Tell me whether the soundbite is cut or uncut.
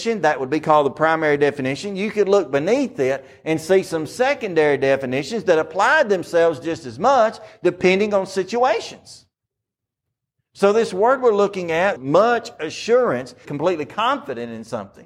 cut